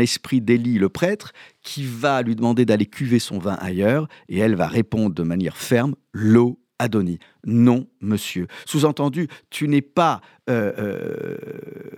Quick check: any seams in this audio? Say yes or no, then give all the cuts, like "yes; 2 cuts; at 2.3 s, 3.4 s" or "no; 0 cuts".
no; 0 cuts